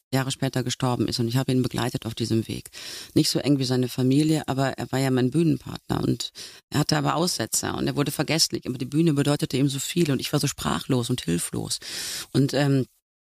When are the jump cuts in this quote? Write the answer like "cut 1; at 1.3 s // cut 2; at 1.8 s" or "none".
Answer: none